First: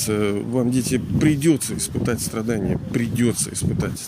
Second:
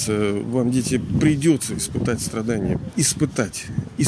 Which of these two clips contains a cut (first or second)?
second